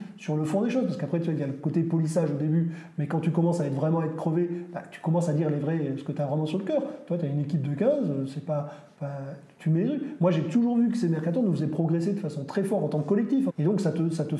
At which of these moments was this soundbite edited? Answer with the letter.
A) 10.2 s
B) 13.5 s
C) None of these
B